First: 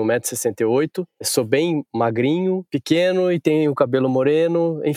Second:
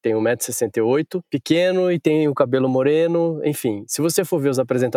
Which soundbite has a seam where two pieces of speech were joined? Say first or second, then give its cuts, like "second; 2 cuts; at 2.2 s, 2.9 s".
second; 1 cut; at 1.3 s